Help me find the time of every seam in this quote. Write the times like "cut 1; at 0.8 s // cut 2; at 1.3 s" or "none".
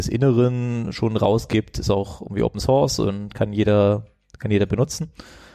none